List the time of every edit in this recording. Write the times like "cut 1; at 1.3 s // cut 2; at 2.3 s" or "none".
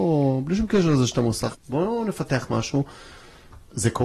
cut 1; at 1.5 s

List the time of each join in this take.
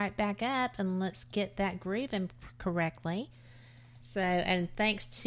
cut 1; at 4.0 s

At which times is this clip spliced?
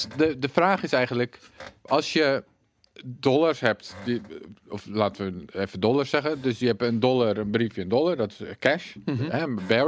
none

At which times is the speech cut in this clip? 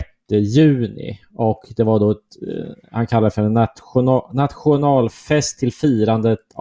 none

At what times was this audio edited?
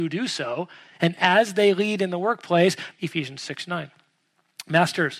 cut 1; at 2.9 s

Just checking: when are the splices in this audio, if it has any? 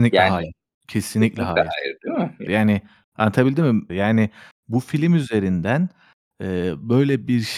cut 1; at 2.5 s // cut 2; at 3.9 s

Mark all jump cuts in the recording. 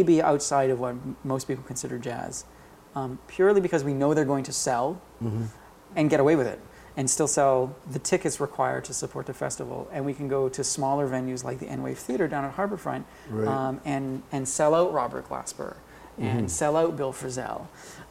cut 1; at 3.2 s // cut 2; at 5.9 s

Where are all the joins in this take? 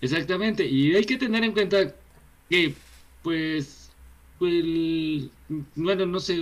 none

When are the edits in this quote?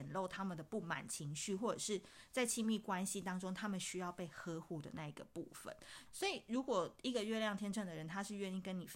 cut 1; at 6.1 s

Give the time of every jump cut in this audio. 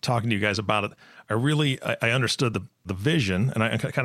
none

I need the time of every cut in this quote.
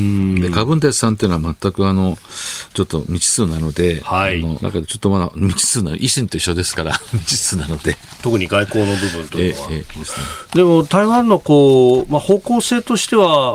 cut 1; at 4.6 s // cut 2; at 10.0 s

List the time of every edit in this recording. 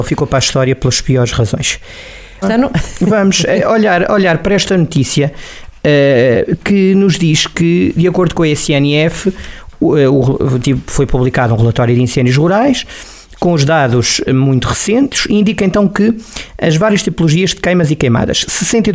cut 1; at 2.4 s

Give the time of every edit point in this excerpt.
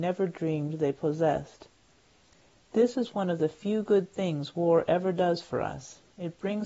none

